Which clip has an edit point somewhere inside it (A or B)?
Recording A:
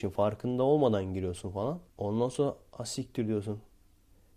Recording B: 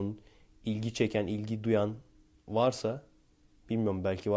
A